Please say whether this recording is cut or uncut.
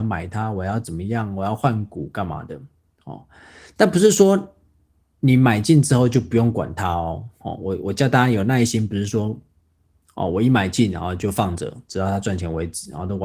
uncut